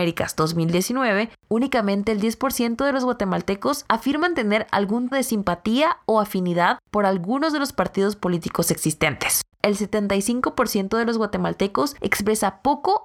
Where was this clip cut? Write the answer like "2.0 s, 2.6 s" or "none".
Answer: 5.1 s, 9.5 s